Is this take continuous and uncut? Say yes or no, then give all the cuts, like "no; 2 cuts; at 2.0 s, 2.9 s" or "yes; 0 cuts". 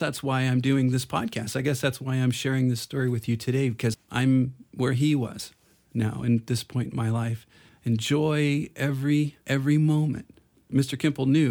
no; 3 cuts; at 3.9 s, 7.7 s, 9.4 s